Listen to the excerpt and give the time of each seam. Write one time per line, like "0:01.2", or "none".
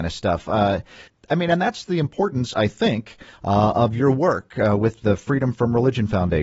none

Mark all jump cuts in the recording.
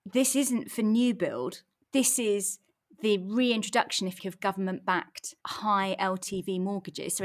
0:04.2
0:05.4

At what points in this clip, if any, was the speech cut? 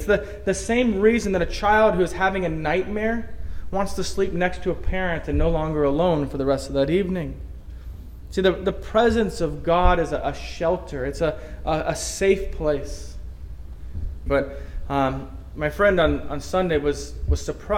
0:14.3

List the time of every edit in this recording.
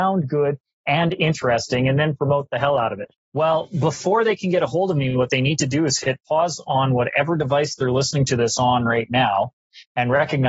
0:03.1

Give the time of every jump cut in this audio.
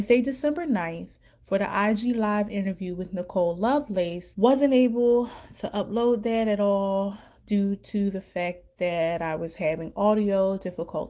0:04.3

